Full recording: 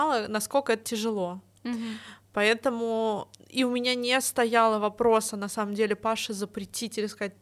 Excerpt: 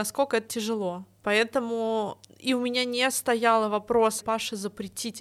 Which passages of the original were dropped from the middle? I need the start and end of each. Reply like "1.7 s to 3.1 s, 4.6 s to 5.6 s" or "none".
1.6 s to 2.3 s, 5.3 s to 6.0 s